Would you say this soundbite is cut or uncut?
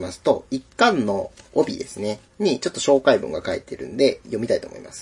uncut